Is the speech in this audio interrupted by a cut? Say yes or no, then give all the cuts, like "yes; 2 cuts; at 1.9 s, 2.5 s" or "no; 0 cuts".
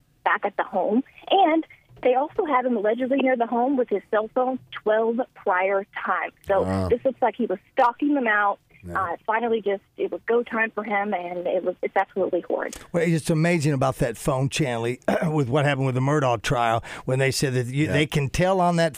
no; 0 cuts